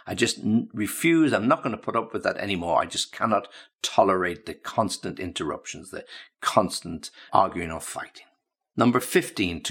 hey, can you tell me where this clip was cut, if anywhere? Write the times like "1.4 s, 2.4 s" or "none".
7.3 s